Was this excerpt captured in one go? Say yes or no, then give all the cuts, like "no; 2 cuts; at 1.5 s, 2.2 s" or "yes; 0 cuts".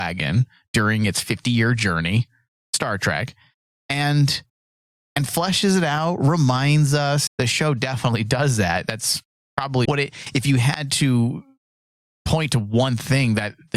no; 2 cuts; at 7.3 s, 9.8 s